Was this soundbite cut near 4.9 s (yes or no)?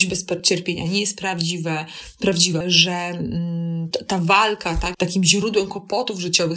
yes